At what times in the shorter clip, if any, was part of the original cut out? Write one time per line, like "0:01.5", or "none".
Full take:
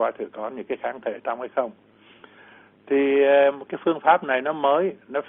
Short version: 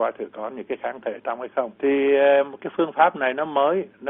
0:01.8

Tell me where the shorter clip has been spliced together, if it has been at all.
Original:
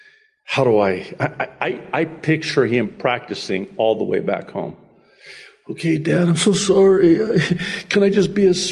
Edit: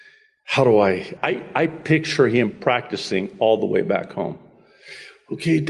0:01.2

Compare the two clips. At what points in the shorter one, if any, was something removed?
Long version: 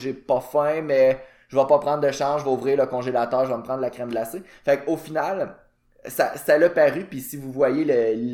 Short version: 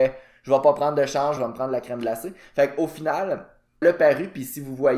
0:01.4
0:03.8

